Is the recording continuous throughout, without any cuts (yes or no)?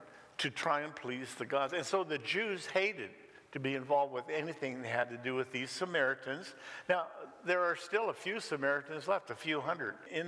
yes